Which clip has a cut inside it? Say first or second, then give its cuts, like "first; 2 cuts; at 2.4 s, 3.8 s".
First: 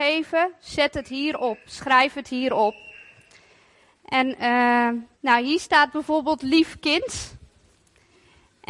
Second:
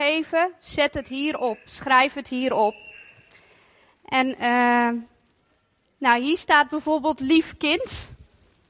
first; 1 cut; at 5.1 s